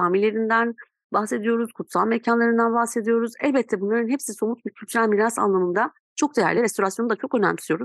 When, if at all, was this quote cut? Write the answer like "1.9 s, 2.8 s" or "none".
none